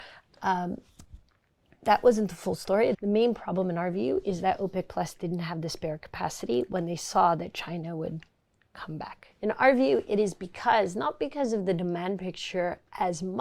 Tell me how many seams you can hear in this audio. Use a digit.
2